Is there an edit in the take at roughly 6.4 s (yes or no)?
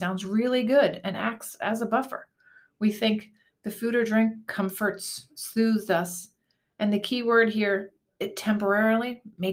no